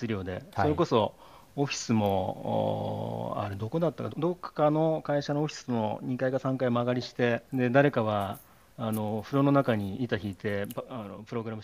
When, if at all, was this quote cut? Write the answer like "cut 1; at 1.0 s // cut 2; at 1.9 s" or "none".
cut 1; at 4.1 s // cut 2; at 7.5 s